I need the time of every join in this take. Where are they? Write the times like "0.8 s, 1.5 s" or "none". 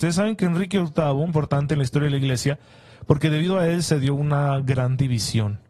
1.3 s

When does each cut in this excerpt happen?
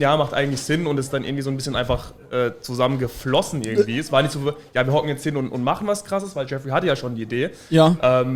none

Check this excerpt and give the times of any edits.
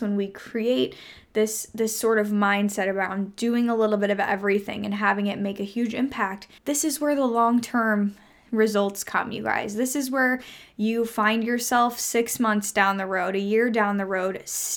6.6 s

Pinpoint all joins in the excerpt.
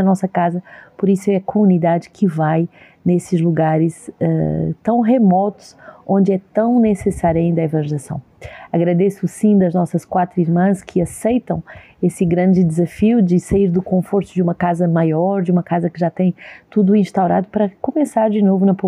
none

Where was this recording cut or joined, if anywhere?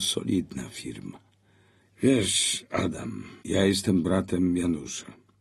1.8 s, 3.4 s

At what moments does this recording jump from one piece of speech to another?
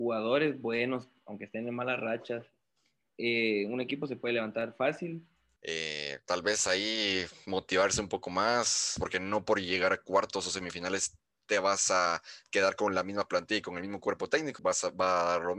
5.6 s, 9.0 s, 14.6 s

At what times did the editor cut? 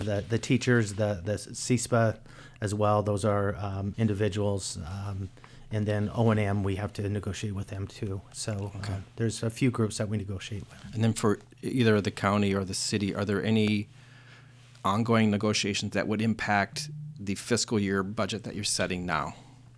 3.9 s

